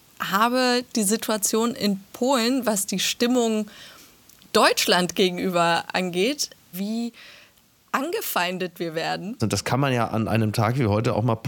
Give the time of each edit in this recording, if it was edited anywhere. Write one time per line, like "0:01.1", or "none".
0:06.7
0:09.4